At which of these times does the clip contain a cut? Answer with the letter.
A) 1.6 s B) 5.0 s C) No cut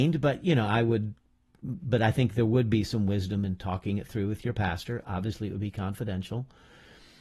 C